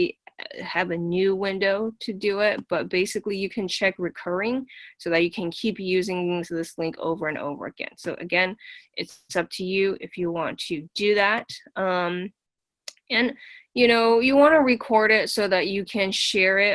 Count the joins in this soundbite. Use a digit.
0